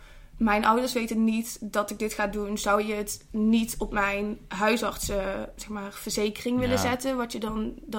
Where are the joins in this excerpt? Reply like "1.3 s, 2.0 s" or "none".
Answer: 5.6 s